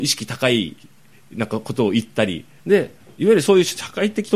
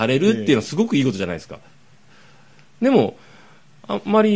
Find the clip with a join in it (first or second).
first